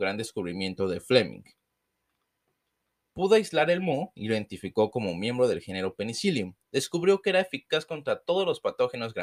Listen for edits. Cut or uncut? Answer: cut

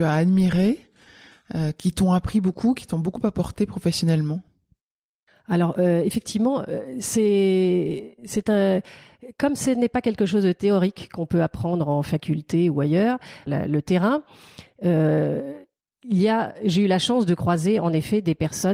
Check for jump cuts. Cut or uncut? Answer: cut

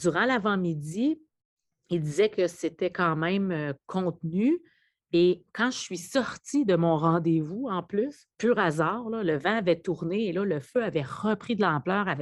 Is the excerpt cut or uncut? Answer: uncut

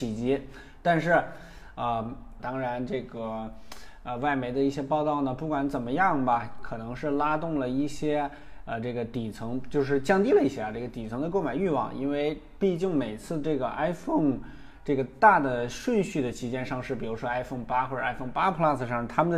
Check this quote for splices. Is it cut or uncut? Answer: cut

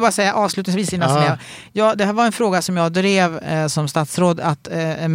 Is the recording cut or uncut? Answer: uncut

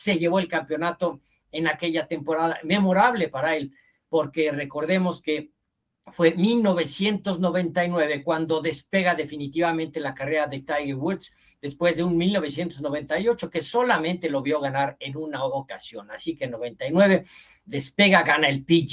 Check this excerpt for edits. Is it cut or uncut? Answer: uncut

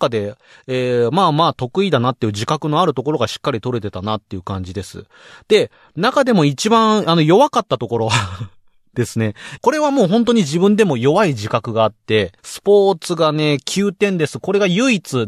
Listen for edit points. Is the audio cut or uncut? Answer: cut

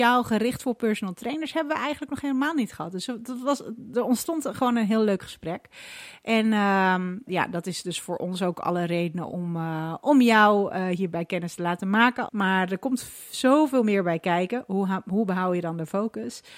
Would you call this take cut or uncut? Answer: cut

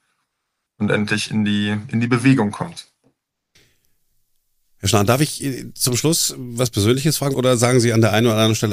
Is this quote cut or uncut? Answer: cut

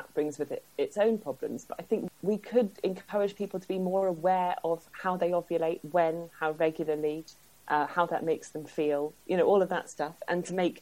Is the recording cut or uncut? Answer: uncut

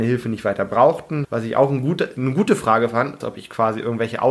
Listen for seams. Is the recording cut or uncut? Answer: cut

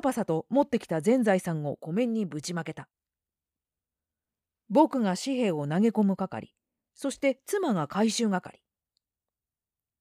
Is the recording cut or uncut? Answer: uncut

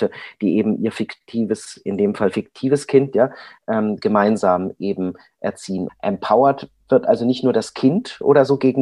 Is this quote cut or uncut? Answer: cut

